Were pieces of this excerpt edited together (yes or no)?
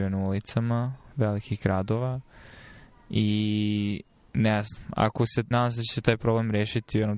yes